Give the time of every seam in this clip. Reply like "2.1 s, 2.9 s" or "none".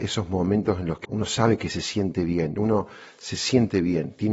1.1 s